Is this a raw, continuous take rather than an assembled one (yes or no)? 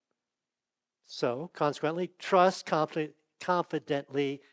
yes